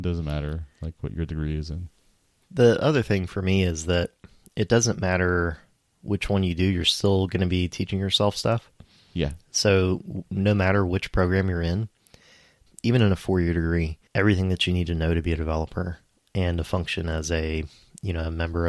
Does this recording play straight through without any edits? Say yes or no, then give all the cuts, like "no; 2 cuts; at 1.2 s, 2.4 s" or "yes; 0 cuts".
no; 2 cuts; at 12.7 s, 14.1 s